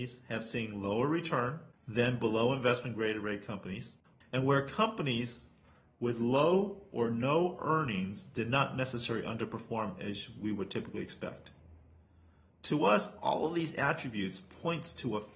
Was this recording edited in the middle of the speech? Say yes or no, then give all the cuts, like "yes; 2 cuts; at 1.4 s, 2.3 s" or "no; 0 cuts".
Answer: yes; 1 cut; at 4.2 s